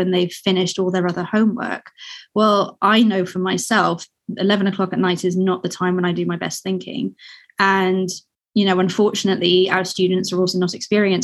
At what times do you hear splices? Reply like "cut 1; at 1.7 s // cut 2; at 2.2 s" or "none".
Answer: none